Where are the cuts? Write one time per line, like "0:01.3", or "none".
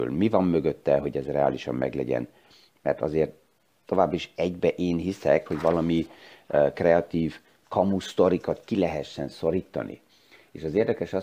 0:05.5